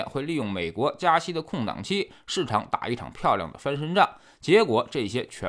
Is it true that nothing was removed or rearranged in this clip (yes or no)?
yes